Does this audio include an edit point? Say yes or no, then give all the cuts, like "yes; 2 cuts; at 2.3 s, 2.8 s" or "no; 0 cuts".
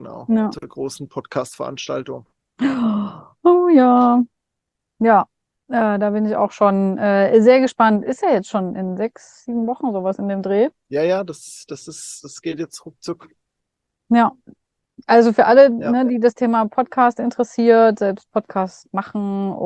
no; 0 cuts